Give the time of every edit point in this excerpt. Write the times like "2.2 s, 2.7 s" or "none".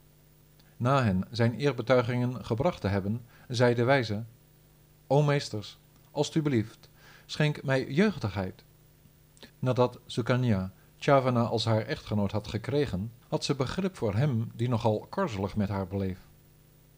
9.5 s, 13.2 s